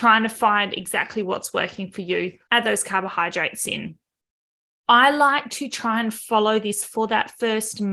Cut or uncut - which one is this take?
cut